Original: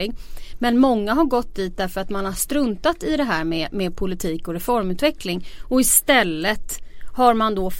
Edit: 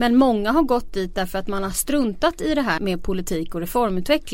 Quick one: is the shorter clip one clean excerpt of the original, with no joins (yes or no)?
no